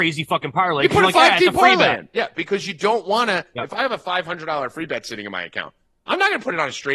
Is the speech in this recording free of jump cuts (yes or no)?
yes